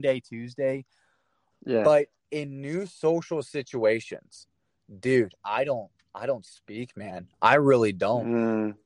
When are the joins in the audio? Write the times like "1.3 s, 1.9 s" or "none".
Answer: 1.5 s, 5.4 s

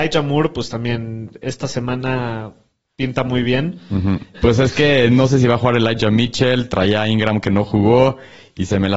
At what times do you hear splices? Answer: 4.3 s

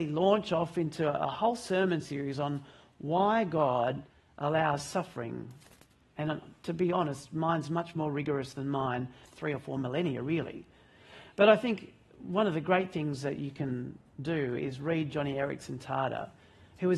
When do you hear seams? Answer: 9.2 s

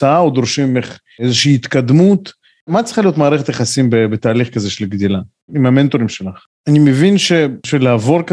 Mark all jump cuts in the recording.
6.5 s

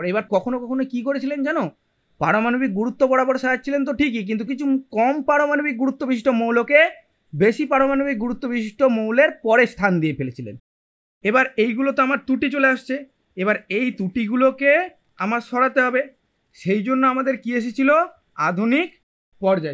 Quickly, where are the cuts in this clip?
4.5 s

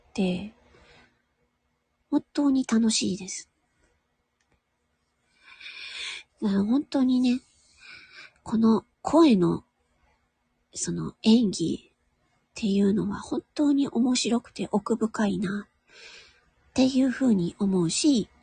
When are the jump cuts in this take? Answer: 6.3 s, 8.9 s

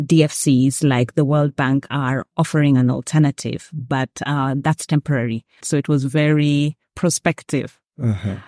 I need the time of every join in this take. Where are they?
5.6 s

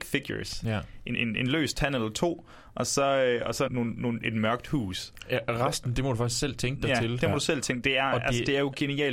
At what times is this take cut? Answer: 1.1 s, 3.7 s

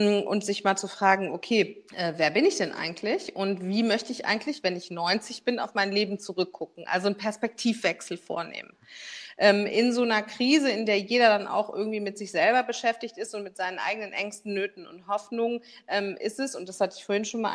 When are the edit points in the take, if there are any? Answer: 1.9 s

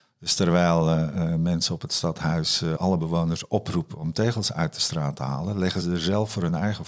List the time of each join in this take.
2.8 s, 5.8 s

